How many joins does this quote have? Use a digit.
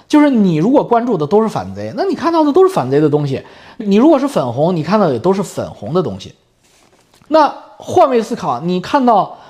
2